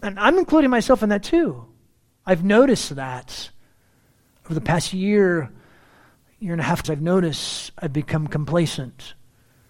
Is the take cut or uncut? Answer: cut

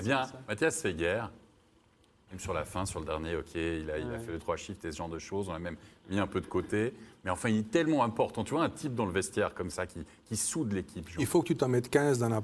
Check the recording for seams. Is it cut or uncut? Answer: uncut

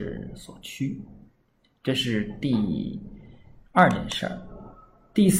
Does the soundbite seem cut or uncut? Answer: uncut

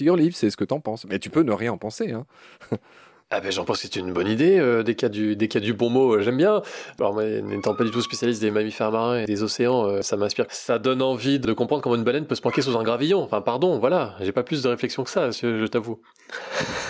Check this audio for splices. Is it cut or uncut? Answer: uncut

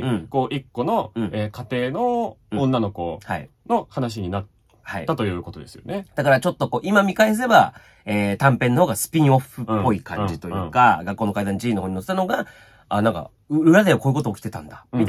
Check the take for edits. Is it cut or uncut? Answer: uncut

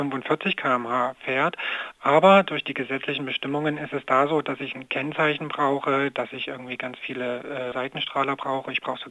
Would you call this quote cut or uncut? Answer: cut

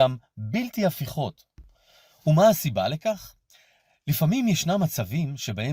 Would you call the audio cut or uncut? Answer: uncut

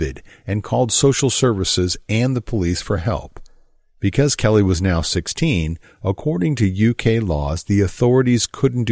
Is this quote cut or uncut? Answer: uncut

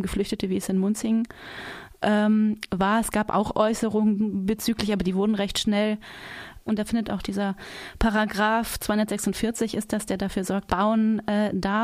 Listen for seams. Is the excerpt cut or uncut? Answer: cut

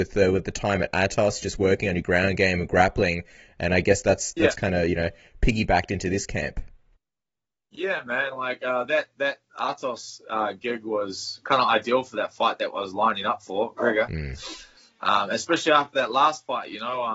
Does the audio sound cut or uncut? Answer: uncut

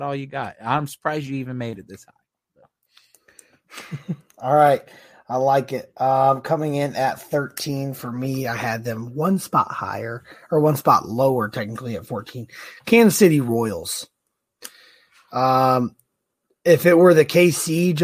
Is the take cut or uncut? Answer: uncut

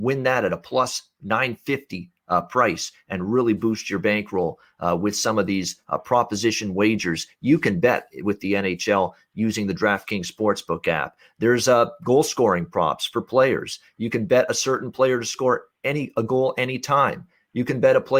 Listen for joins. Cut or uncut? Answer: uncut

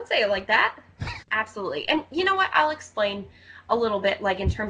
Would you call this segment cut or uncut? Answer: cut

